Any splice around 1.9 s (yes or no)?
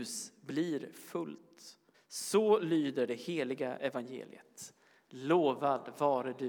yes